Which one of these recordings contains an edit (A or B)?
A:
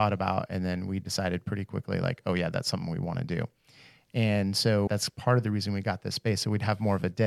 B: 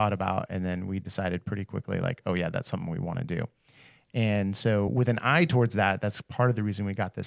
A